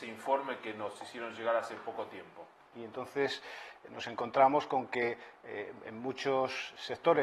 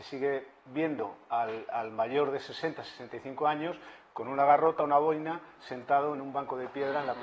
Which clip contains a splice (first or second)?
first